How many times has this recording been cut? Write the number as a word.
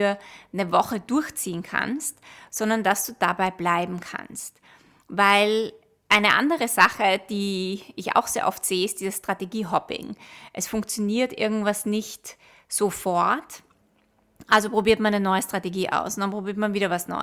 zero